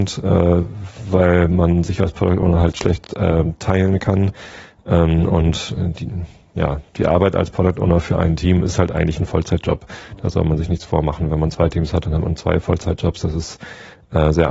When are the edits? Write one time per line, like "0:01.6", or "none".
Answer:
none